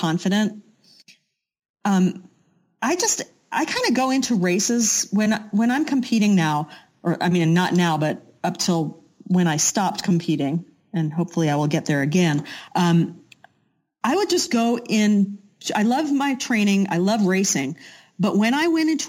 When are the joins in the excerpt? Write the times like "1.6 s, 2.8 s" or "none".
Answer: none